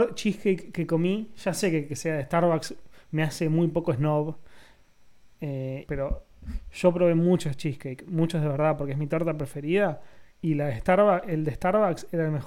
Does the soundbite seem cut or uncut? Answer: cut